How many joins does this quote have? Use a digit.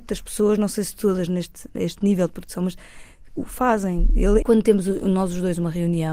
2